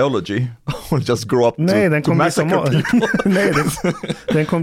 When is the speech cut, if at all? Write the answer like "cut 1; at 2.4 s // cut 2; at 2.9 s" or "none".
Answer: none